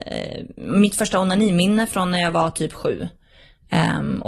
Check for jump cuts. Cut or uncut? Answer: uncut